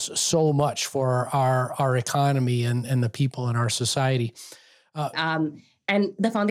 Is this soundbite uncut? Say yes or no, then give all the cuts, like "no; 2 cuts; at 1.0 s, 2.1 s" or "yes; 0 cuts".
no; 1 cut; at 5.1 s